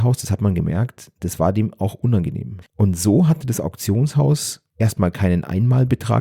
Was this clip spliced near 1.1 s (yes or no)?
no